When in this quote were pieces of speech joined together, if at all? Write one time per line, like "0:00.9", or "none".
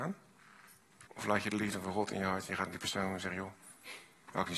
0:01.1

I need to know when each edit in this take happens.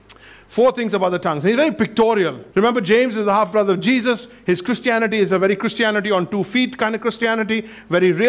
0:02.5

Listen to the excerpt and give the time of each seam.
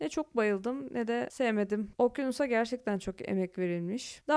0:02.0

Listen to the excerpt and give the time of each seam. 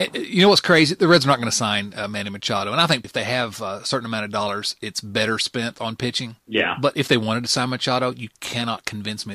0:03.0
0:06.4

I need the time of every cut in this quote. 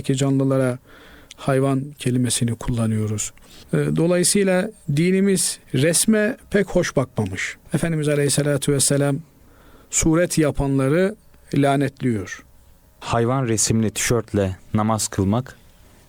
0:05.6
0:07.7
0:12.8

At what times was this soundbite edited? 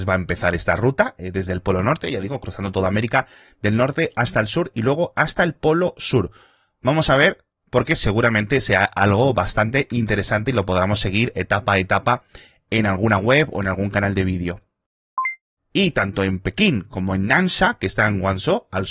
0:15.6

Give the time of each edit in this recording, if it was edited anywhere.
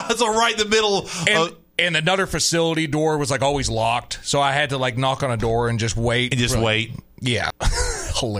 0:07.5

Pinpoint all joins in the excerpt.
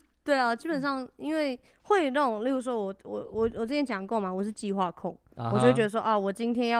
none

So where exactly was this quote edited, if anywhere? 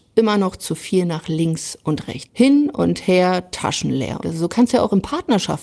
0:02.3
0:04.2

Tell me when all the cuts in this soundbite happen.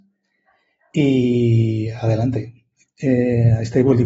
0:02.9

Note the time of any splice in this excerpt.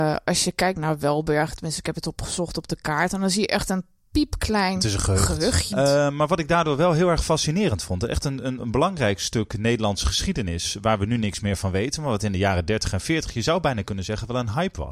0:05.7

